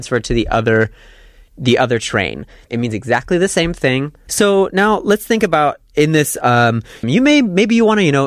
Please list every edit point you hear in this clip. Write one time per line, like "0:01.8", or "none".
0:02.7
0:04.3
0:07.0